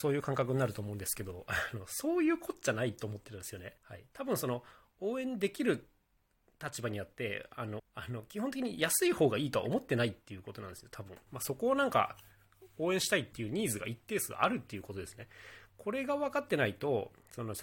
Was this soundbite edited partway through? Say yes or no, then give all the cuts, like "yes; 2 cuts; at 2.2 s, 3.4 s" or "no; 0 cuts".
yes; 3 cuts; at 3.8 s, 7.8 s, 11.3 s